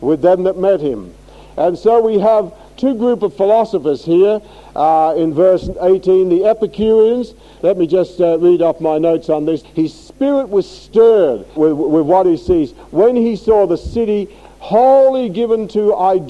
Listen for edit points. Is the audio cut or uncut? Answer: cut